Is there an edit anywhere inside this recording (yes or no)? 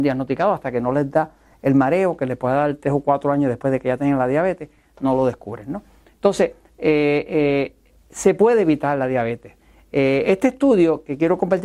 no